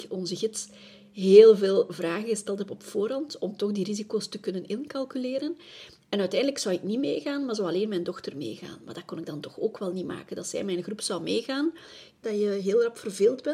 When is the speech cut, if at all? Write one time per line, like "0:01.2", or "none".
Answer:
0:12.2

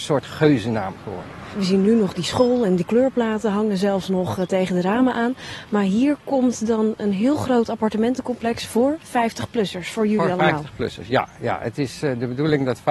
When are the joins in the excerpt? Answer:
none

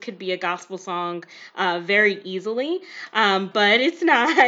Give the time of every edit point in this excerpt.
none

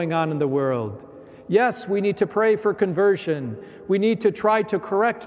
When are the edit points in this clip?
none

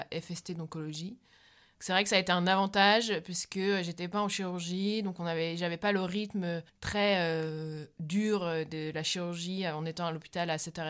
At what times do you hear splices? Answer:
none

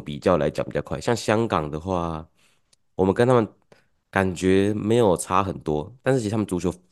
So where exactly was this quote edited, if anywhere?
none

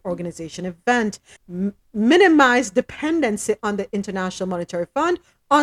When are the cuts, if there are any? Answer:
0:01.4

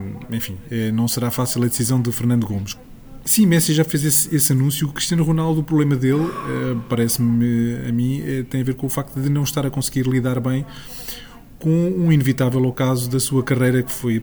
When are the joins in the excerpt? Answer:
0:03.2

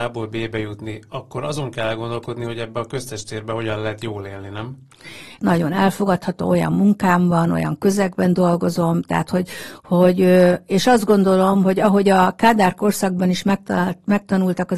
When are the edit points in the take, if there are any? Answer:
0:05.4

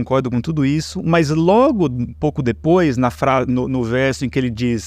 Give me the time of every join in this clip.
none

